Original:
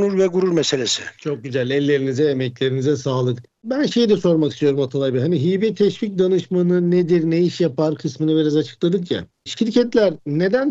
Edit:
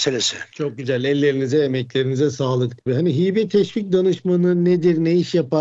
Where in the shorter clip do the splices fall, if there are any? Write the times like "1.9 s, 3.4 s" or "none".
2.9 s

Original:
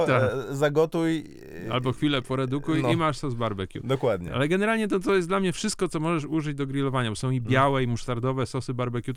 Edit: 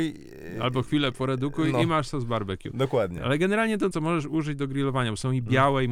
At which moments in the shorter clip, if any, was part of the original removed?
3.9 s

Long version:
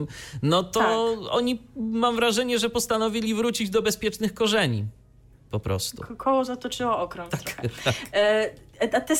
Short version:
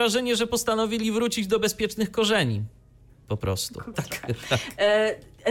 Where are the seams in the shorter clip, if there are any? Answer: 3.9 s

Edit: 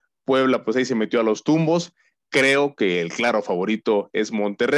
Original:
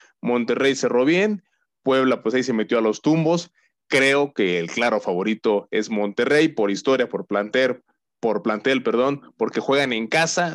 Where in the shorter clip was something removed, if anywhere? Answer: none

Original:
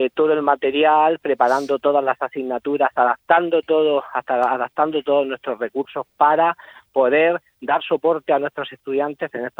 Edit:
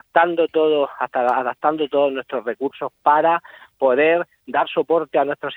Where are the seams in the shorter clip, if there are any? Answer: none

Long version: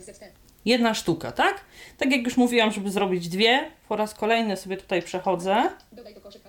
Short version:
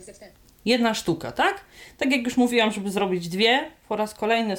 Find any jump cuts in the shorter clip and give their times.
none

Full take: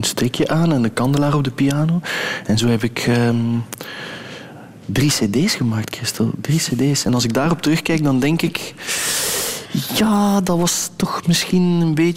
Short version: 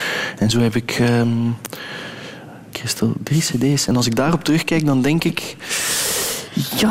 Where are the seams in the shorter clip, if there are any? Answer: 2.7 s

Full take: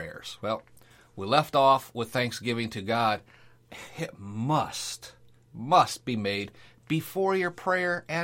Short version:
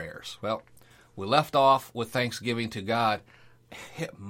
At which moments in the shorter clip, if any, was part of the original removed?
none

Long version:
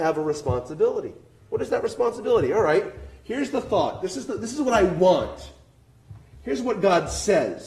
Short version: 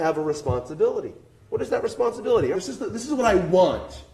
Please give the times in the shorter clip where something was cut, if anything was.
2.5 s

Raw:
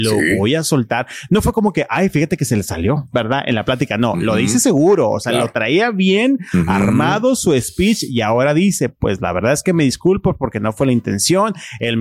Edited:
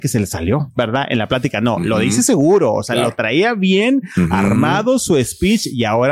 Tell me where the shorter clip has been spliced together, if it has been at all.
none

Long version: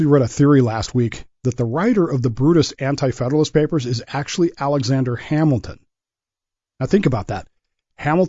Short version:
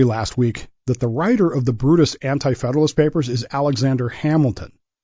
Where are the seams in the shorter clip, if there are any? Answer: 3.5 s

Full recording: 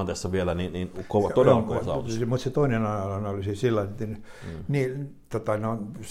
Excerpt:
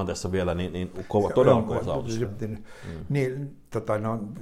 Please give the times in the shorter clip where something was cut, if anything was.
2.3 s

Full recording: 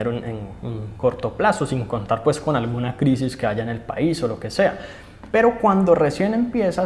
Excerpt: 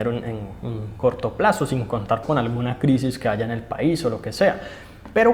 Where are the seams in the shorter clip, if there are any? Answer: 2.2 s

